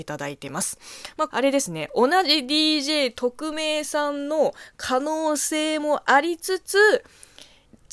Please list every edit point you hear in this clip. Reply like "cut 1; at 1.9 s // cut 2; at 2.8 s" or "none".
cut 1; at 1.3 s